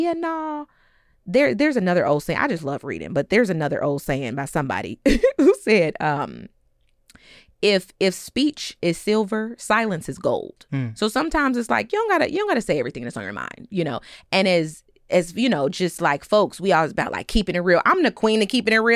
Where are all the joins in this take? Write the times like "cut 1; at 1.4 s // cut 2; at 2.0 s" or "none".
none